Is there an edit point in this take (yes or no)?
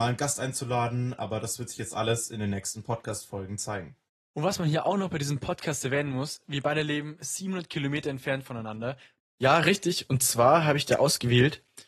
yes